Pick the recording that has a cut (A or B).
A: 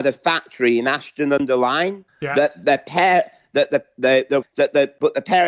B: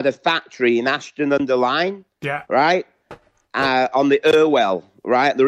A